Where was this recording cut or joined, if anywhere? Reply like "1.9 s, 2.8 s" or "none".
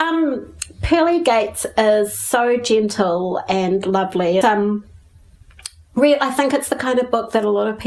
4.4 s